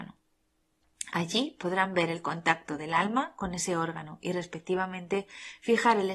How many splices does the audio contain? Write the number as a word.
zero